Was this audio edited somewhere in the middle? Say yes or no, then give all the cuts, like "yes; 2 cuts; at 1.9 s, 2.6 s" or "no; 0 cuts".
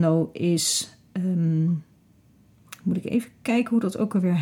no; 0 cuts